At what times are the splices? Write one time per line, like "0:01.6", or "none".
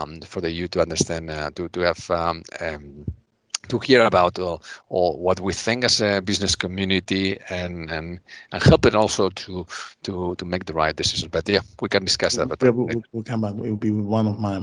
none